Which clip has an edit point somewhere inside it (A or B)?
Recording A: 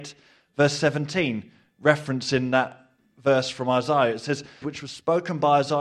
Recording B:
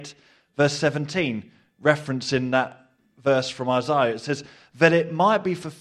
A